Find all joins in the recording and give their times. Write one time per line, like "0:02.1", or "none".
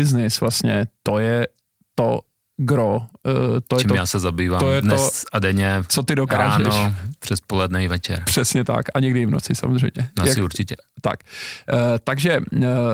none